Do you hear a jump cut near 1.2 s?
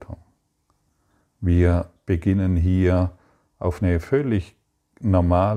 yes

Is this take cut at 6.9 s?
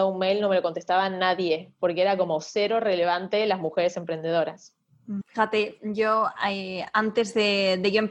no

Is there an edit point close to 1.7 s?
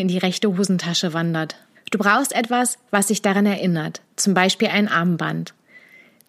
yes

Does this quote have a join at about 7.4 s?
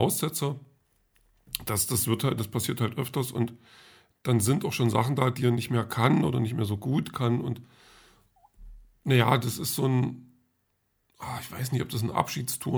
no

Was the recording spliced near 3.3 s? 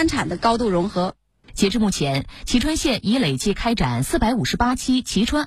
no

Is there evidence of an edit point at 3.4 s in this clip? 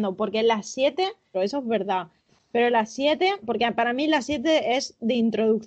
yes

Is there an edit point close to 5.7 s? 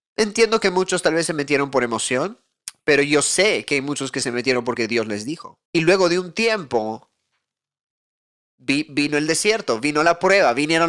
yes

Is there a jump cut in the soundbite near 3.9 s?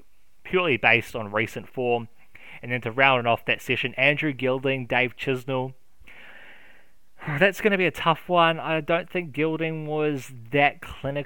no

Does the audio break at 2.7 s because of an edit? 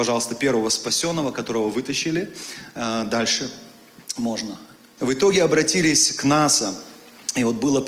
no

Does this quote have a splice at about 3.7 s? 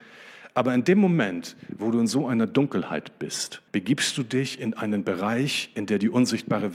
yes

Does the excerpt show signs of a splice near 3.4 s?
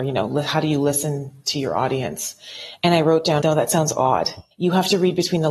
yes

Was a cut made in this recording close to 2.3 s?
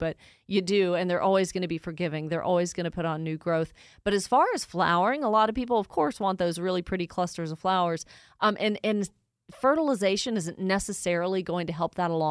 no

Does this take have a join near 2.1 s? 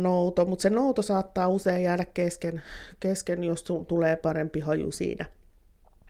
no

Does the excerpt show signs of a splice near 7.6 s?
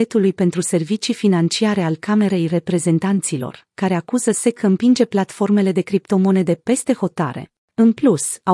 yes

